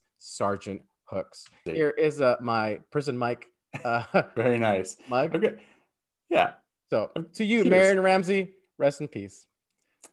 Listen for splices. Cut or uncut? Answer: cut